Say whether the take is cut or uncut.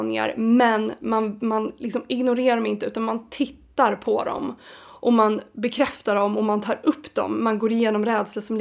uncut